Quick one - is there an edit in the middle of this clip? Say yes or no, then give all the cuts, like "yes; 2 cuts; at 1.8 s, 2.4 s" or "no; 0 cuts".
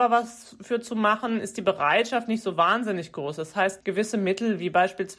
yes; 1 cut; at 3.8 s